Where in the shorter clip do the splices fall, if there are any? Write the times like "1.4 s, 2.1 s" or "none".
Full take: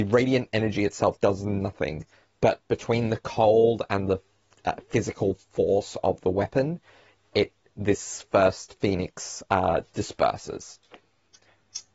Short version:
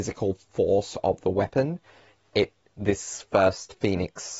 none